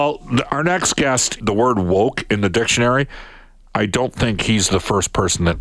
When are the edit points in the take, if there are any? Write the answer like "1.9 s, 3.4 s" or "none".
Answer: 1.4 s

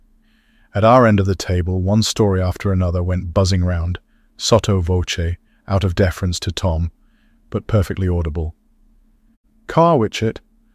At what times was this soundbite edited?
none

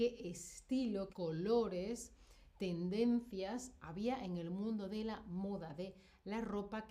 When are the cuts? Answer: 1.1 s

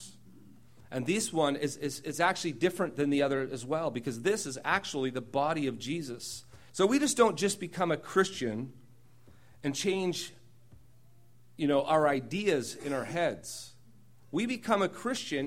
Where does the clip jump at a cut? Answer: 6.7 s

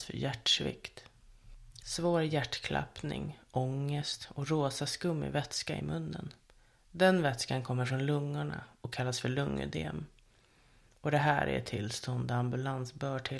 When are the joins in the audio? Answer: 1.8 s

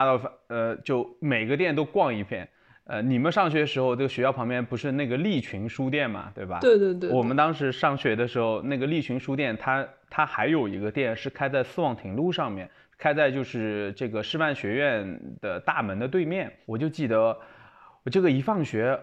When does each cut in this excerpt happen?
16.6 s

